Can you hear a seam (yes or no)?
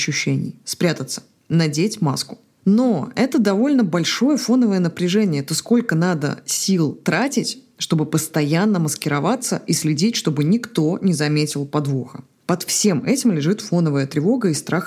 no